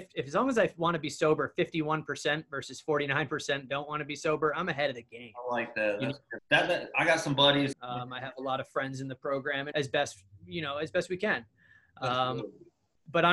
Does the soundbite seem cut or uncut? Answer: cut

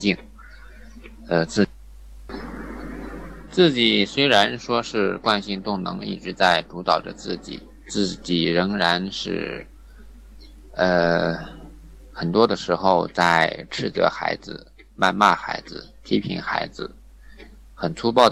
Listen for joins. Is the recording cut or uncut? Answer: uncut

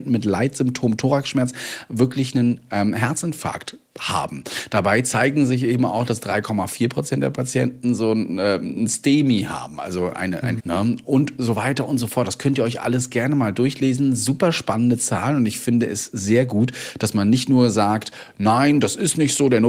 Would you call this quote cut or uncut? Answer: cut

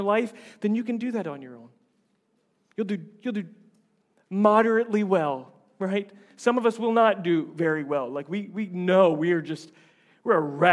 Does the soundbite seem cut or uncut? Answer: uncut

